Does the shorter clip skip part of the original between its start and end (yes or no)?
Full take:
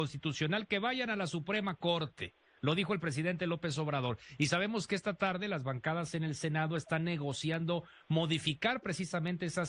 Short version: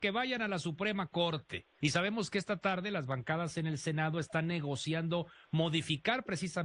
yes